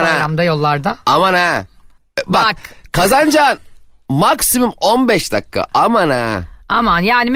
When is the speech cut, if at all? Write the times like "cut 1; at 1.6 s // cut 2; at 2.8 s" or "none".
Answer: none